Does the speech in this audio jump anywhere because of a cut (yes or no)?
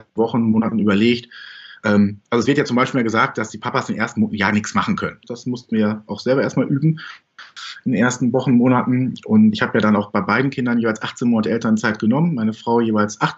yes